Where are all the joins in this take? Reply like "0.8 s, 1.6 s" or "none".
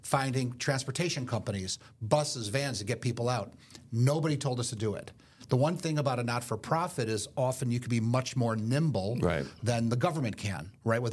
none